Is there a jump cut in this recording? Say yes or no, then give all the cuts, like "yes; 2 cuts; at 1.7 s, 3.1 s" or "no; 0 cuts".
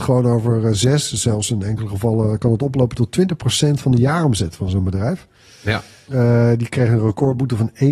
yes; 1 cut; at 6.1 s